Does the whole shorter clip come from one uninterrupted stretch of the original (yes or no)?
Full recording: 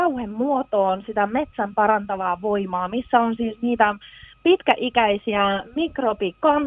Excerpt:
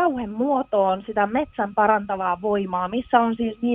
yes